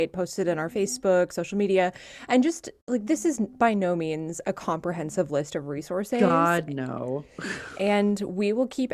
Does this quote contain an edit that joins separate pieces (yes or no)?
no